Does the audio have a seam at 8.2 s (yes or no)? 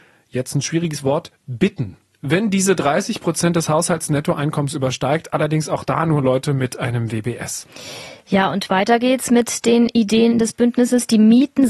no